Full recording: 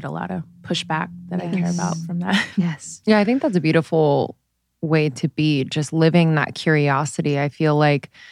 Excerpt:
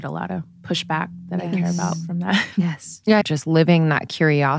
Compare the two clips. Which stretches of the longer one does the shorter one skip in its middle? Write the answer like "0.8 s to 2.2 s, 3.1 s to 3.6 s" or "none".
3.2 s to 5.7 s

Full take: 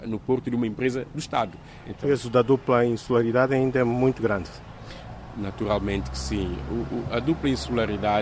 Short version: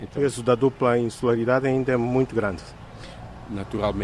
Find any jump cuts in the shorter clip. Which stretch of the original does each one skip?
none

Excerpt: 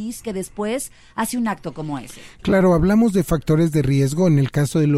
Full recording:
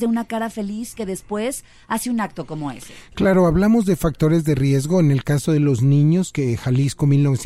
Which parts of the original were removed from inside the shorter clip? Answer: none

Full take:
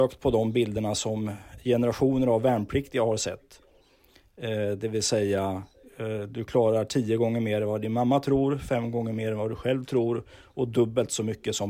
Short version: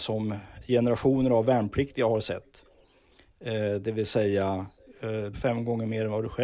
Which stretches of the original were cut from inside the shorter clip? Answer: 6.3 s to 8.6 s

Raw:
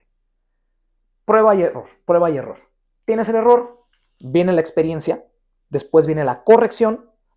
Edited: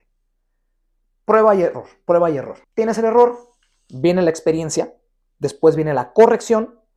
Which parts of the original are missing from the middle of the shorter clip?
2.6 s to 2.9 s

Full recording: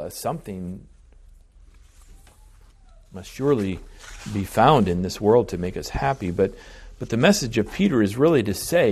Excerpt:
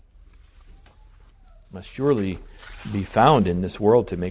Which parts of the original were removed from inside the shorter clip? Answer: none

